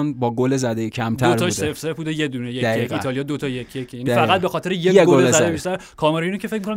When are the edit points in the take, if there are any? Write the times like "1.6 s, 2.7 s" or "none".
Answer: none